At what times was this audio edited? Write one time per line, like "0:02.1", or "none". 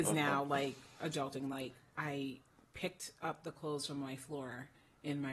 none